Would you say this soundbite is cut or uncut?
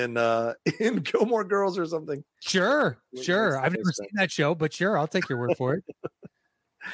uncut